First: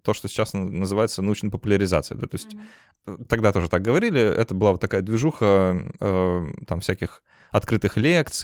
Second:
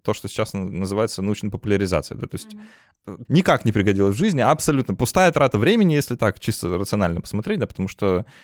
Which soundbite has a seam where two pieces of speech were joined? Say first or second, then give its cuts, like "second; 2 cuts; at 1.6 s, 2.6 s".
second; 1 cut; at 3.2 s